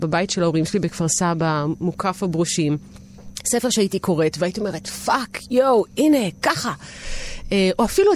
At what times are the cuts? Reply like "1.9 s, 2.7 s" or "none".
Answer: none